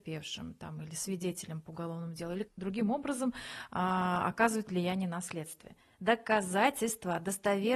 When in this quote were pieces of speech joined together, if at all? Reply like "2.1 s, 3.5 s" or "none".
2.4 s